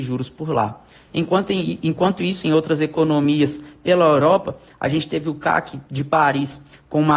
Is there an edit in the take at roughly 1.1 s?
yes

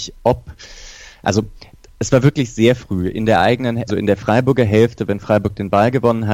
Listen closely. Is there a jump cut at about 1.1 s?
no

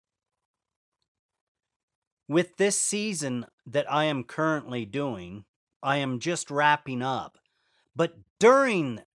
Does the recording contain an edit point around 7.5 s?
no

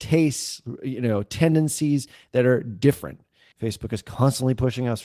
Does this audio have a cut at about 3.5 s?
yes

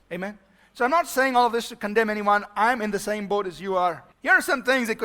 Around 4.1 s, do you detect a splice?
yes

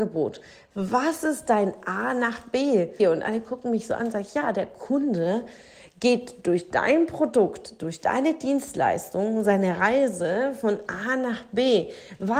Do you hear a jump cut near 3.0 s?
yes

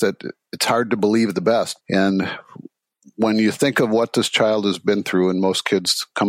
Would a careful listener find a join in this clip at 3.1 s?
no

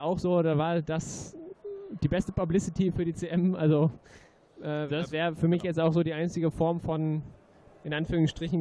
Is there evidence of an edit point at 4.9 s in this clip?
yes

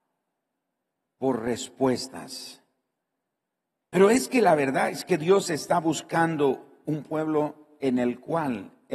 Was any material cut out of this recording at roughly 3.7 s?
yes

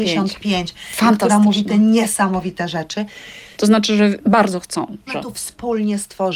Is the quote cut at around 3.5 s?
yes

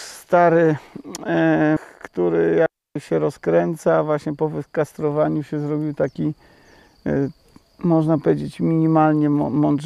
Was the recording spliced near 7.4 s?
no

